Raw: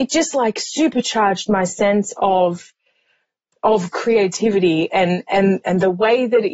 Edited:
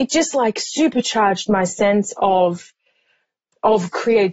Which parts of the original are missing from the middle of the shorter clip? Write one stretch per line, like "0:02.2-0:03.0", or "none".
none